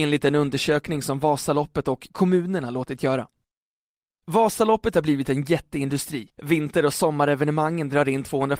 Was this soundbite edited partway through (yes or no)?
yes